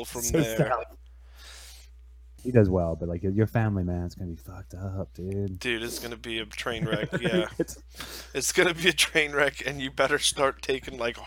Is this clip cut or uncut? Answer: cut